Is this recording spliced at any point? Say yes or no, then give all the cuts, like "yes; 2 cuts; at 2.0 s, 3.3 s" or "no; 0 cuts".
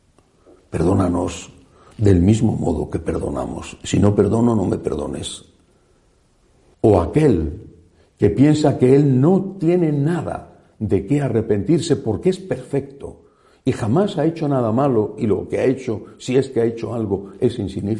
yes; 1 cut; at 6.7 s